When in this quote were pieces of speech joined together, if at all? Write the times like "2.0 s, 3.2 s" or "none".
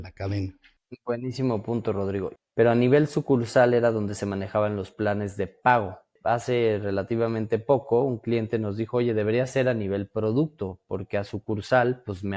2.4 s